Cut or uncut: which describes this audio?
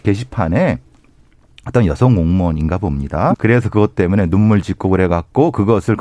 cut